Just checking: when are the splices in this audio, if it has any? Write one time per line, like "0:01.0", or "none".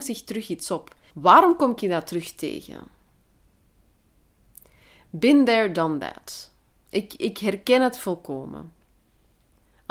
0:01.1